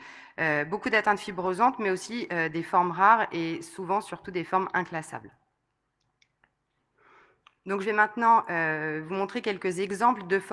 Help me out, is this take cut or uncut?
uncut